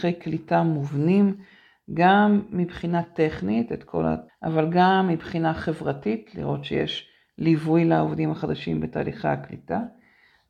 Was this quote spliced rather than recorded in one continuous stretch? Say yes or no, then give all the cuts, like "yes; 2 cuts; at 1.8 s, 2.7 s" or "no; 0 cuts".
yes; 1 cut; at 4.3 s